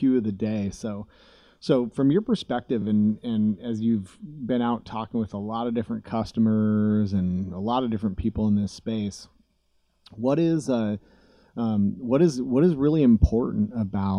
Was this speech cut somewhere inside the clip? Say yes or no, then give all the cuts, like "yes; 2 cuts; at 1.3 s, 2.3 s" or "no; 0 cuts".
no; 0 cuts